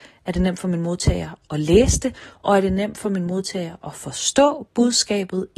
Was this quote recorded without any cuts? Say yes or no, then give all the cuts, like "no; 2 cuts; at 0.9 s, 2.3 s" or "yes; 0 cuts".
yes; 0 cuts